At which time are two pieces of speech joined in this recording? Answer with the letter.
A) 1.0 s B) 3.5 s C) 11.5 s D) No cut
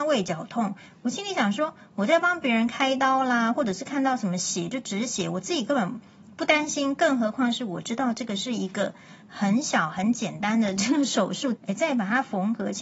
C